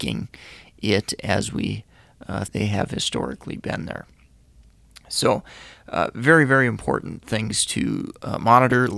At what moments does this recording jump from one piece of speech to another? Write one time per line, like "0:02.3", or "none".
0:02.4